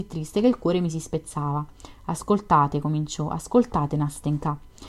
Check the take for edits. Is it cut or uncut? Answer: uncut